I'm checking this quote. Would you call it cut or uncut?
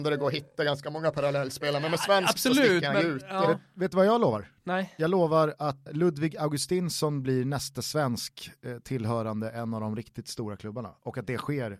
cut